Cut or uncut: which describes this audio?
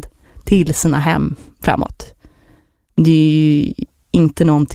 uncut